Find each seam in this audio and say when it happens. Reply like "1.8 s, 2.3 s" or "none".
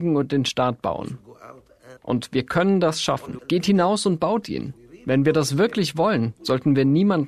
2.0 s, 3.4 s